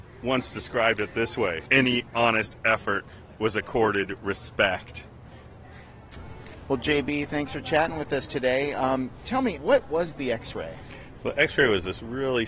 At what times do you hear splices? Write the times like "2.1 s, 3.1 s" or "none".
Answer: 1.6 s, 9.5 s